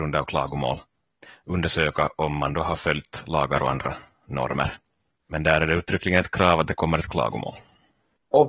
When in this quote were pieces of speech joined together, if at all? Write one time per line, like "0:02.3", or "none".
none